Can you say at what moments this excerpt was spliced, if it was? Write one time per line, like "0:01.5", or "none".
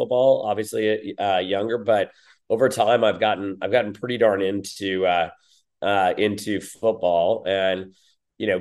none